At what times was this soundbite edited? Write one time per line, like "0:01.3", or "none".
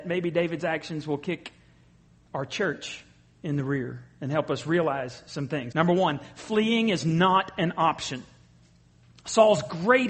0:05.7

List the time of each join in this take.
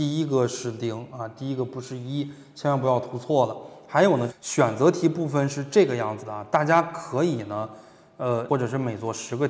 0:04.3
0:08.5

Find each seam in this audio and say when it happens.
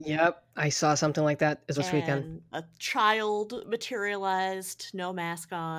0:01.8

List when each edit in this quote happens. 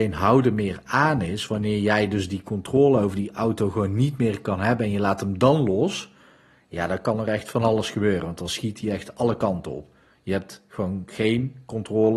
none

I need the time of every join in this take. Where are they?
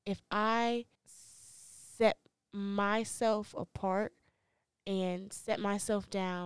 0:01.0

